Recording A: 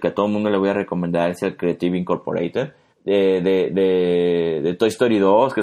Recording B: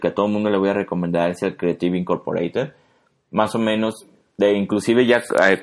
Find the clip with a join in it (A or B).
A